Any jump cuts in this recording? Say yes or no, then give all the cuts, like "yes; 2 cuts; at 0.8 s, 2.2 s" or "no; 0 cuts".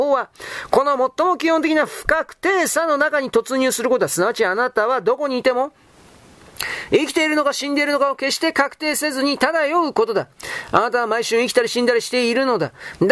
no; 0 cuts